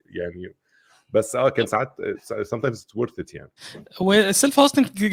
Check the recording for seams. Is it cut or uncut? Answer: cut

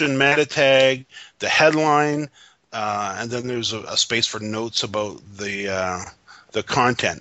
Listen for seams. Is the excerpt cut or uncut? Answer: uncut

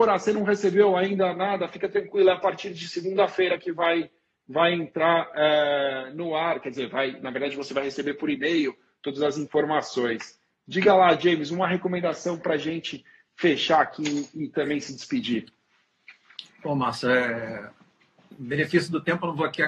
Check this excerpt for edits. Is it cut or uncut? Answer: uncut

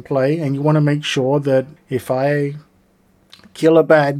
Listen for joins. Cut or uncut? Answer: cut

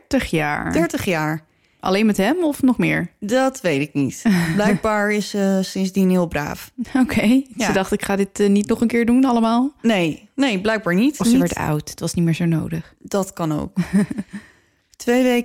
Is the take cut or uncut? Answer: uncut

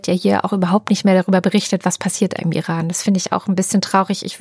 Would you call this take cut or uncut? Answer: cut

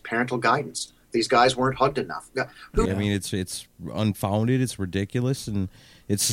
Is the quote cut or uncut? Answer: cut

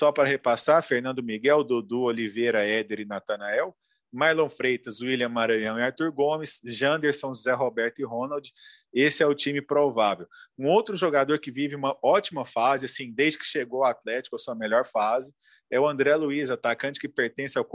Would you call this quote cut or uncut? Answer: uncut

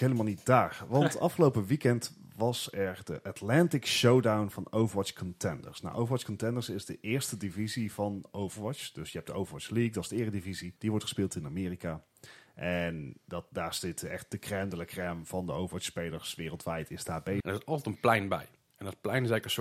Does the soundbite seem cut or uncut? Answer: cut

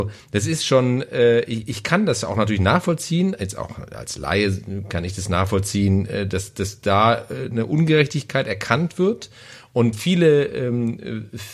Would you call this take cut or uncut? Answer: uncut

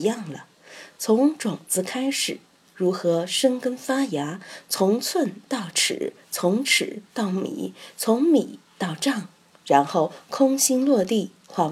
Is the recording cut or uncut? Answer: uncut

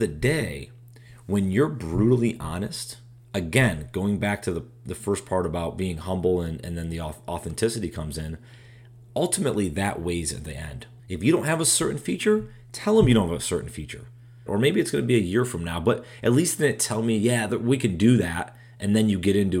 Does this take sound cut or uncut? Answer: cut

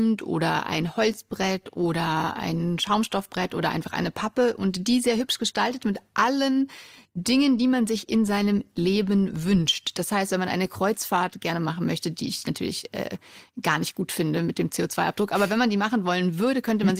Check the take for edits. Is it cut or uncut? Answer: uncut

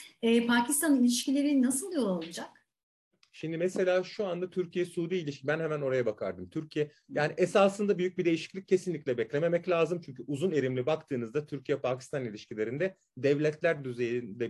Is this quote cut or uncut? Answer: uncut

